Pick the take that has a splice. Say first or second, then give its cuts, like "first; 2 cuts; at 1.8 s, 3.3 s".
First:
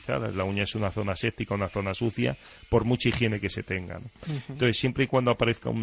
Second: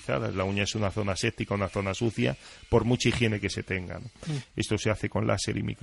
second; 1 cut; at 4.4 s